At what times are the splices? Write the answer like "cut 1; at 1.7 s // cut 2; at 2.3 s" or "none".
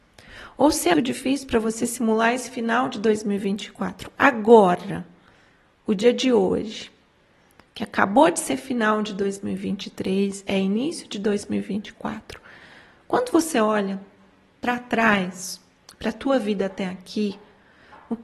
cut 1; at 0.9 s